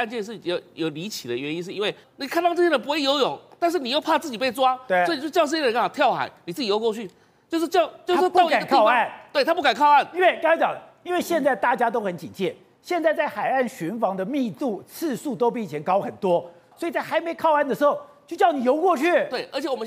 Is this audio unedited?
no; 2 cuts; at 2.0 s, 16.7 s

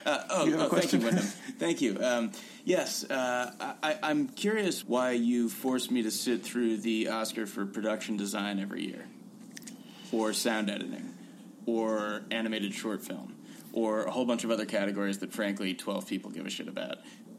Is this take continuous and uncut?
no; 1 cut; at 4.8 s

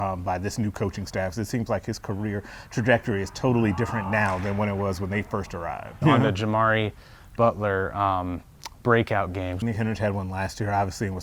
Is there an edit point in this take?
yes; 2 cuts; at 6.0 s, 9.6 s

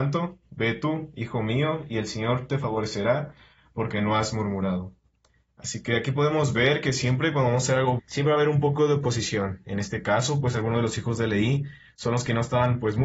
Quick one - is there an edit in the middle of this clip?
yes; 1 cut; at 8.0 s

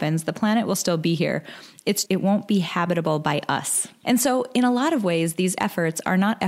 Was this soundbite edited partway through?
yes; 2 cuts; at 2.1 s, 4.0 s

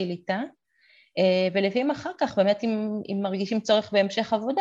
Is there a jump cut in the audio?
no; 0 cuts

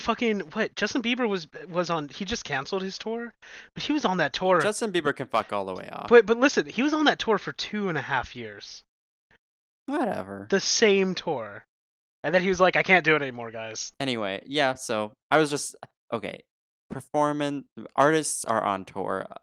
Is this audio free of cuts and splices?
no; 2 cuts; at 13.9 s, 16.1 s

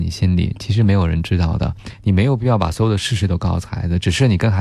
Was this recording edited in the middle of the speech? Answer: yes; 1 cut; at 1.9 s

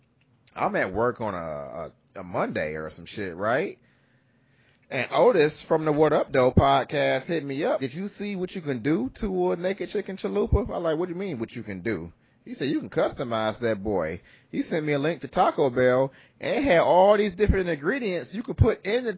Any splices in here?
yes; 1 cut; at 7.8 s

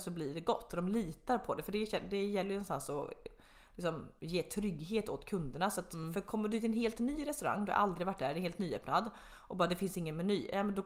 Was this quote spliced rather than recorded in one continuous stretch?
no; 0 cuts

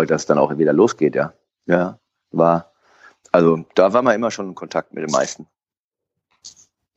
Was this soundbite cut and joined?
no; 0 cuts

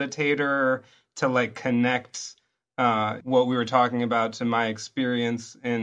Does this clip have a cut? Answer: yes; 1 cut; at 3.2 s

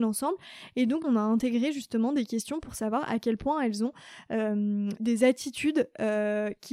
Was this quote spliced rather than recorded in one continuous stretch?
yes; 2 cuts; at 1.0 s, 5.0 s

